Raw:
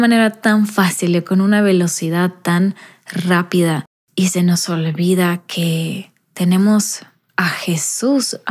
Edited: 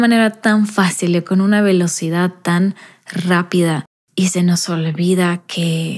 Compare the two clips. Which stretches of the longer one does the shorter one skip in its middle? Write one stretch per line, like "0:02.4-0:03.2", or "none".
none

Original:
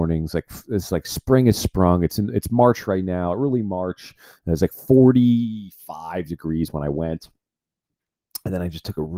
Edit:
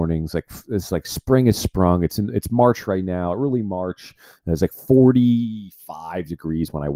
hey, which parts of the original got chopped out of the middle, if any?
none

